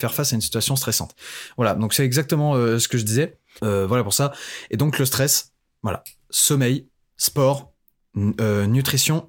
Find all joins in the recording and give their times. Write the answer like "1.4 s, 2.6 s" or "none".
3.6 s